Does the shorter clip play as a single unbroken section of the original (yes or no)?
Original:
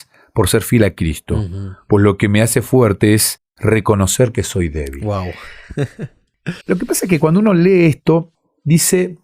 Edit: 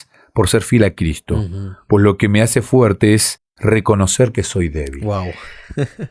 yes